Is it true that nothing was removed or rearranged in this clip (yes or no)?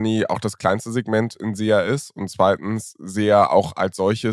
yes